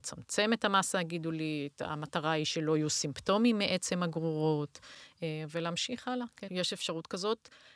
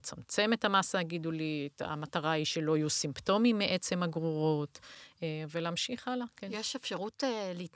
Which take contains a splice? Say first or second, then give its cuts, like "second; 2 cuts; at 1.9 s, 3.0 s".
first; 1 cut; at 6.5 s